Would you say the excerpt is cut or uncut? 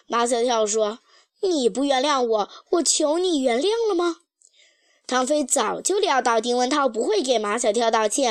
uncut